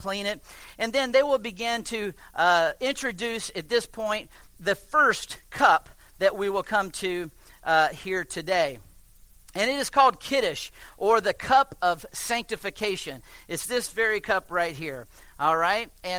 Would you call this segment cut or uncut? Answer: uncut